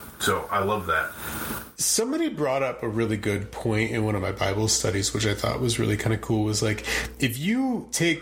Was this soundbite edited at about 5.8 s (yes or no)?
no